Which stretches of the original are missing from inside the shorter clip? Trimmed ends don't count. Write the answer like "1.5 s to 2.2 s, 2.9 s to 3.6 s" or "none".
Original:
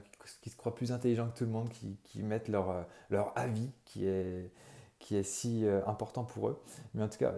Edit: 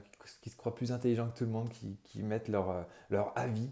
none